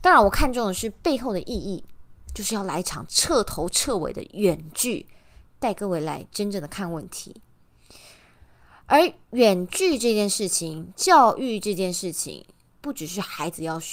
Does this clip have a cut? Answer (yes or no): no